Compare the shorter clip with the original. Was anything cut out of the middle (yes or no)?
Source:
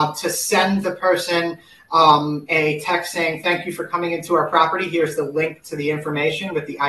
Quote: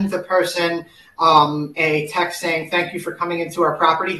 no